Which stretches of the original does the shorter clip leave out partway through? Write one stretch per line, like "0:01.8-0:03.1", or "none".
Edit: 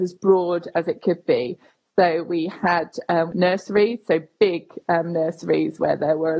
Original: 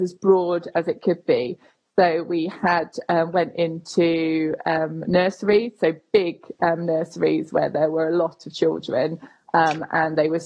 0:03.3-0:05.0